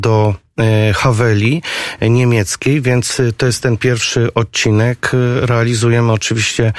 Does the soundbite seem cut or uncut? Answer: uncut